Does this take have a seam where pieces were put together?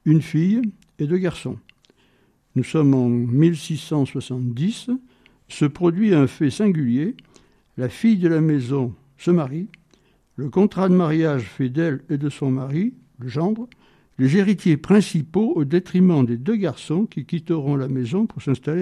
no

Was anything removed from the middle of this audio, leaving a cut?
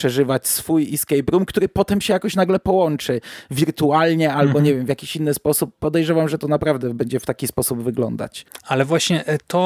no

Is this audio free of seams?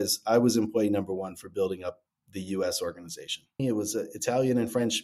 no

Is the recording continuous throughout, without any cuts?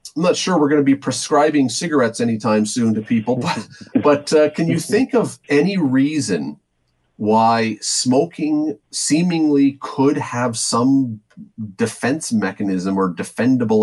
no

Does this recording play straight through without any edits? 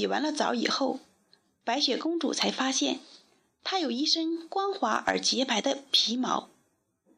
yes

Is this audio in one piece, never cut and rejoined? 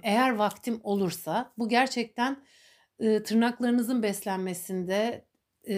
yes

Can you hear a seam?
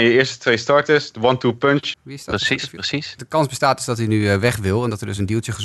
yes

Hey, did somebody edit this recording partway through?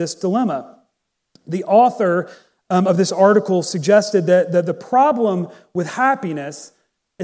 no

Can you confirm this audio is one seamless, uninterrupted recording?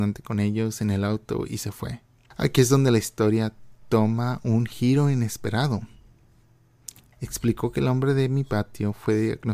no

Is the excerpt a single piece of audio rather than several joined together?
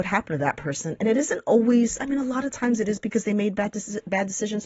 yes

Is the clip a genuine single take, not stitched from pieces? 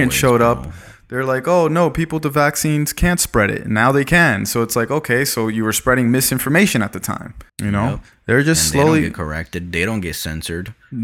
no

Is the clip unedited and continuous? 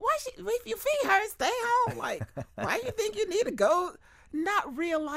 yes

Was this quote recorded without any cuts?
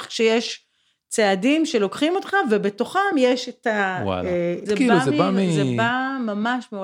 no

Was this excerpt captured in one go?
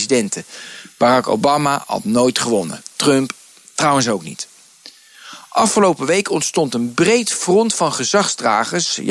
yes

